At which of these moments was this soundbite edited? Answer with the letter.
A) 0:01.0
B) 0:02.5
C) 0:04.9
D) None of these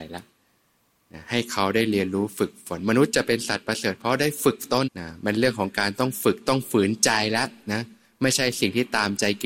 C